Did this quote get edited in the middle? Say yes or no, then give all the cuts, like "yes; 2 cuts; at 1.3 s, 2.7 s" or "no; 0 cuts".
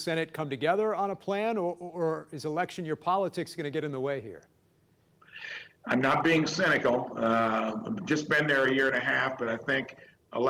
no; 0 cuts